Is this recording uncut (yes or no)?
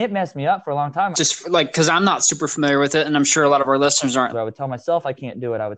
no